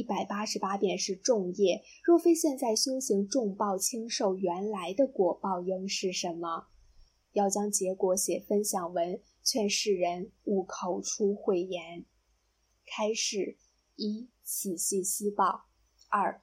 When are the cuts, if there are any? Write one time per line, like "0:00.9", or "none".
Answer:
none